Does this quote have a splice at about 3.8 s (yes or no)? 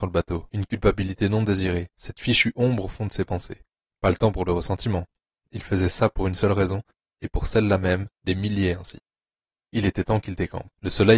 no